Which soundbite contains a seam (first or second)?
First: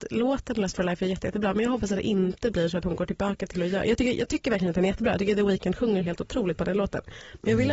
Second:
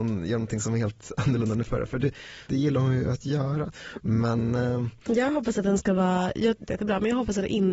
second